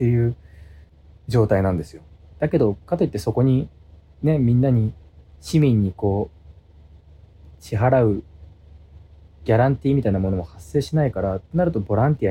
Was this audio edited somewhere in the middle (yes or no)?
yes